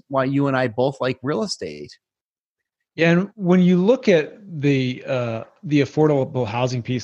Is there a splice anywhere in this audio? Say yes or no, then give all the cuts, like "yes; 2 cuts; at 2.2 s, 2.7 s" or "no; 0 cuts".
no; 0 cuts